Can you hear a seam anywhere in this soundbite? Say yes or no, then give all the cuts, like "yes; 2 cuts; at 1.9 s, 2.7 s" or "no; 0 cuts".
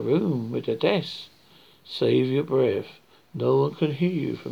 no; 0 cuts